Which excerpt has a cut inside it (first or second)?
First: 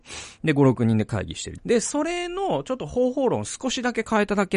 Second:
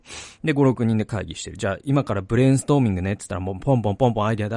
first